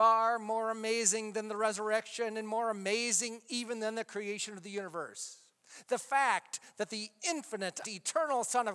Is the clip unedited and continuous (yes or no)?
no